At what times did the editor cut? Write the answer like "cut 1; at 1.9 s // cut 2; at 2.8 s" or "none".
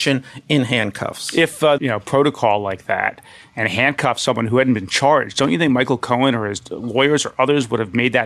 cut 1; at 1.8 s